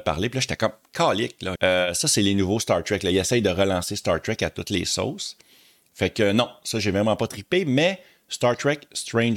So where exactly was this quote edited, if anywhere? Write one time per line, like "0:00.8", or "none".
0:01.6